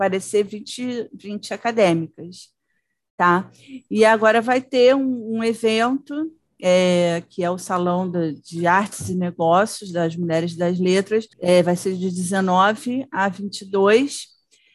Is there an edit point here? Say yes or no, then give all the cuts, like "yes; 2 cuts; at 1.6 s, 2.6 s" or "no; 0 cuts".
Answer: yes; 1 cut; at 11.3 s